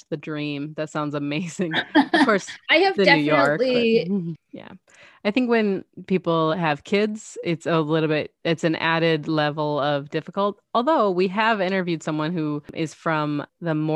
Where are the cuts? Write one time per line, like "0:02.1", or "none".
0:04.4

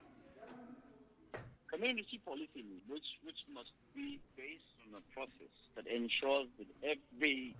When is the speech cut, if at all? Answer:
0:01.6
0:02.8
0:04.3

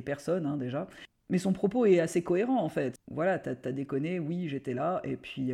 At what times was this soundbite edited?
none

